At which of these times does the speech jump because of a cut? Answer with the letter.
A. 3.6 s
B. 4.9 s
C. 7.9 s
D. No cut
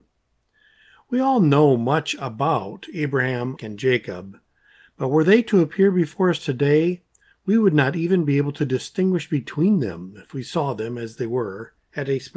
A